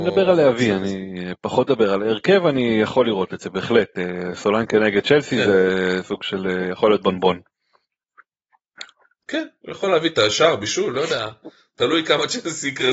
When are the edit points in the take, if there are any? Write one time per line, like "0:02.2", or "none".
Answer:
none